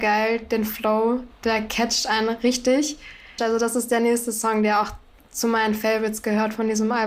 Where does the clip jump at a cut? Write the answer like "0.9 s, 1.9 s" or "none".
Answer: 1.3 s, 3.4 s